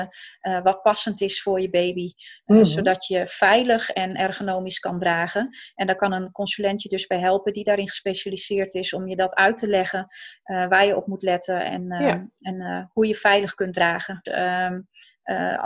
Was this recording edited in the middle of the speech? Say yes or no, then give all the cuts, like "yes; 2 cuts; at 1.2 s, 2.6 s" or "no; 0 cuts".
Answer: yes; 1 cut; at 14.2 s